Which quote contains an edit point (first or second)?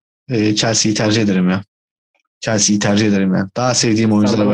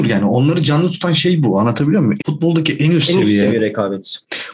second